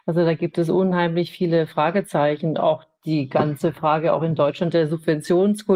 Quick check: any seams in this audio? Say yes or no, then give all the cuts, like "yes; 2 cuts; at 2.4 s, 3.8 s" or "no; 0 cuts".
no; 0 cuts